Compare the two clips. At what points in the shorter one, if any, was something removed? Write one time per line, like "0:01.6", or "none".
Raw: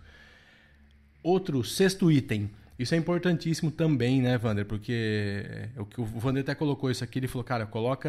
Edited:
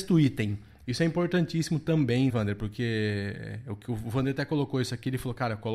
0:02.3